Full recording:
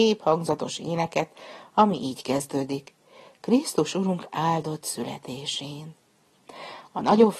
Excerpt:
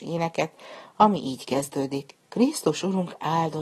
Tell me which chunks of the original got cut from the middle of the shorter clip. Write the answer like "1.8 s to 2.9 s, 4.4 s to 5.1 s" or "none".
3.0 s to 3.3 s